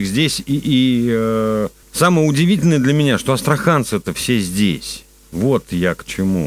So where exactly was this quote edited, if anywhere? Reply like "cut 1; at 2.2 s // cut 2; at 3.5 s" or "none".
none